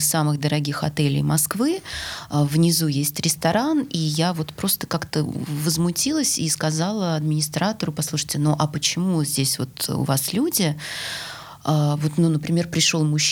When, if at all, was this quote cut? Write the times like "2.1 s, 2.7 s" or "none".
none